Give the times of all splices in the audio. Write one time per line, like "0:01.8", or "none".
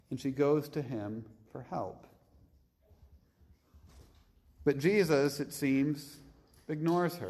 none